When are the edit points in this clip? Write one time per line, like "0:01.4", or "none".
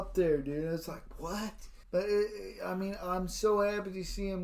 0:01.8